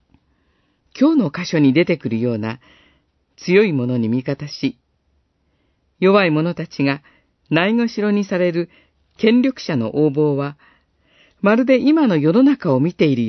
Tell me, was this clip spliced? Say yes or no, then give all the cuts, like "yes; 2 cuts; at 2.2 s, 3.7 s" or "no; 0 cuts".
no; 0 cuts